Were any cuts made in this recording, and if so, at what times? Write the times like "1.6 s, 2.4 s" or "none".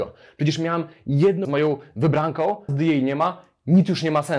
1.4 s, 2.7 s